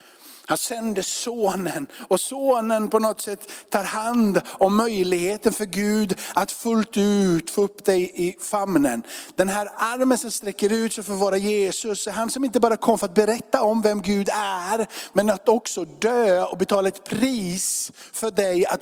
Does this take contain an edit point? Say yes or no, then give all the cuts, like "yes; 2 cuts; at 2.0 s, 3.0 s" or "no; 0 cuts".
no; 0 cuts